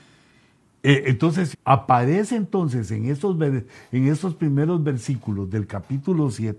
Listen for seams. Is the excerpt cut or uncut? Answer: cut